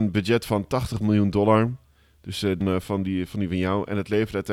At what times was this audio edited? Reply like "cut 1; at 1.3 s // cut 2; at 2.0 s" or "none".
cut 1; at 2.6 s

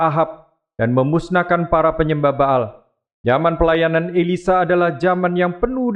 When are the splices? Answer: cut 1; at 3.1 s

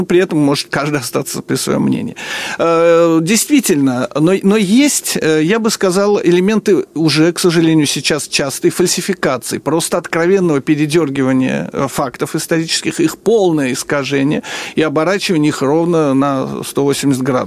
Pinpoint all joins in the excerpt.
none

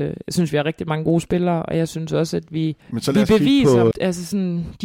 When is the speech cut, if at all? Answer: cut 1; at 2.8 s // cut 2; at 3.9 s

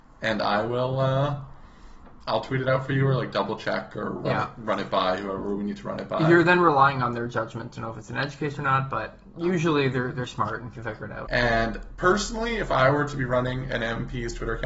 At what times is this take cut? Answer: cut 1; at 11.3 s

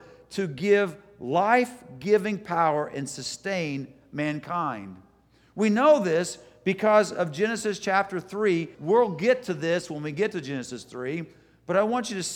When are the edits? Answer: cut 1; at 8.7 s

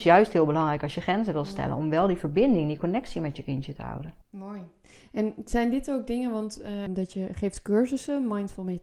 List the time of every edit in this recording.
cut 1; at 4.2 s // cut 2; at 6.9 s

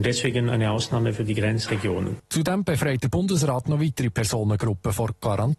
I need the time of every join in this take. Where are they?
none

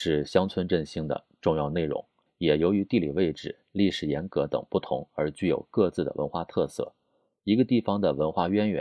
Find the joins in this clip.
cut 1; at 2.3 s

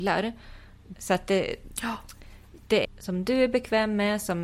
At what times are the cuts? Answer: cut 1; at 0.9 s // cut 2; at 2.8 s

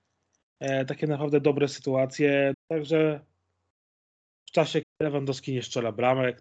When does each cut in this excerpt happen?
cut 1; at 2.5 s // cut 2; at 4.8 s

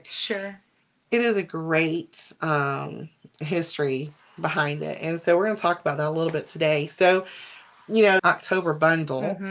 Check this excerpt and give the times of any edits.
cut 1; at 8.2 s

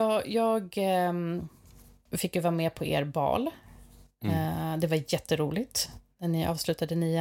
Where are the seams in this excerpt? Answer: none

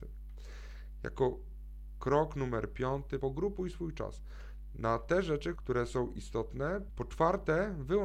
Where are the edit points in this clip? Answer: cut 1; at 3.2 s // cut 2; at 5.6 s // cut 3; at 6.9 s

